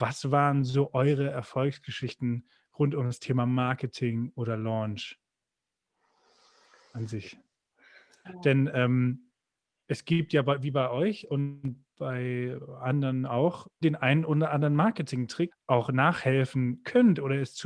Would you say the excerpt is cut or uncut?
cut